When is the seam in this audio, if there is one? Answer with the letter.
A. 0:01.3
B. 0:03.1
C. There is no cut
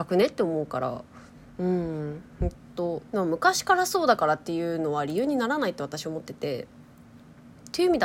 B